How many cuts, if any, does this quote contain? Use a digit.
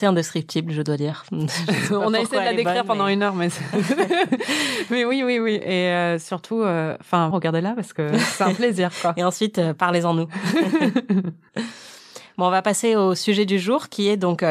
1